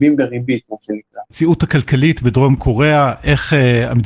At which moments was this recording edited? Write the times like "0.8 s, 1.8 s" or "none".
1.3 s